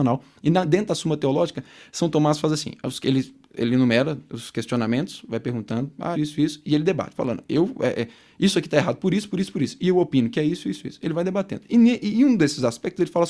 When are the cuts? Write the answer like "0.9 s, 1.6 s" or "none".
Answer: 6.1 s